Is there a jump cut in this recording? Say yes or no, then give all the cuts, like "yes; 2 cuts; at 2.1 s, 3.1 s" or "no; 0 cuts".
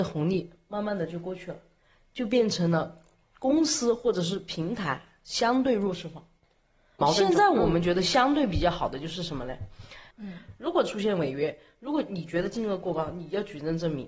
yes; 2 cuts; at 7.0 s, 10.1 s